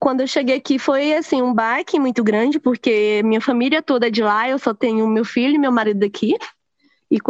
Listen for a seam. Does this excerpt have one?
no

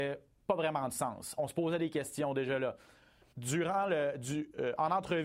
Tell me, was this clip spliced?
yes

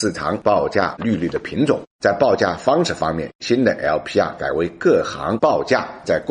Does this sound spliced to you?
yes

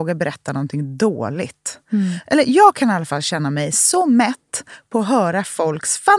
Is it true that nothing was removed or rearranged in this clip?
yes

